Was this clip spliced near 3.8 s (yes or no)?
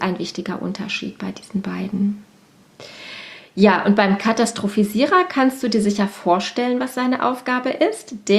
no